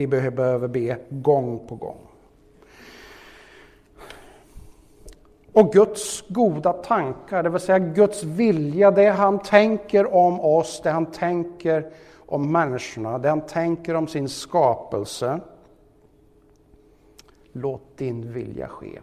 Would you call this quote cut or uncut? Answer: uncut